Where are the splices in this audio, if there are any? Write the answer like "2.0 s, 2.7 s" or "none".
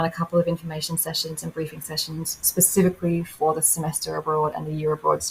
2.4 s